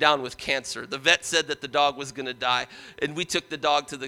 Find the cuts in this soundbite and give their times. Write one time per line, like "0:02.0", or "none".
none